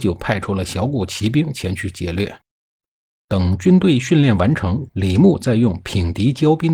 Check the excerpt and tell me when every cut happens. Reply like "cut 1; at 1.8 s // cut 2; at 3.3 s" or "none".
cut 1; at 3.1 s // cut 2; at 4.9 s